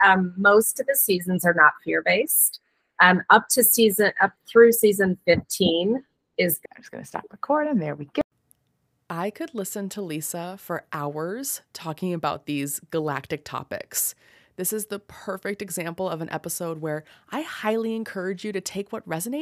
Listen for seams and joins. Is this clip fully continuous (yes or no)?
no